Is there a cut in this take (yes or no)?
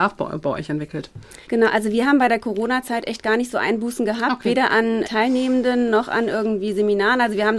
yes